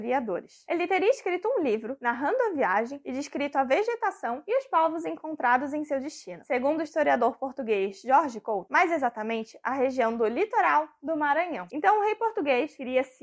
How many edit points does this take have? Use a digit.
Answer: 2